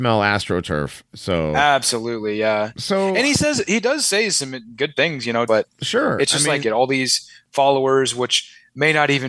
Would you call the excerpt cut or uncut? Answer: cut